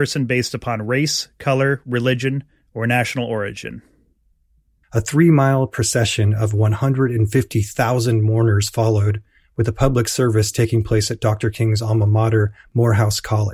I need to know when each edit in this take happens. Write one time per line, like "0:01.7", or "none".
0:04.8